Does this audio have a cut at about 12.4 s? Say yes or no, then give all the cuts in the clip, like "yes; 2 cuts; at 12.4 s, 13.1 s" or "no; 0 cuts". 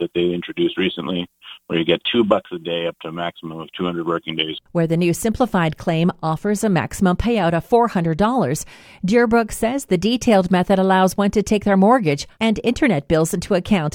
yes; 1 cut; at 12.4 s